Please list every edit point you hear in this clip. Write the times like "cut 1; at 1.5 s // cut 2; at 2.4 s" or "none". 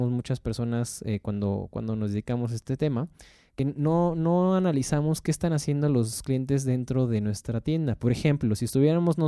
none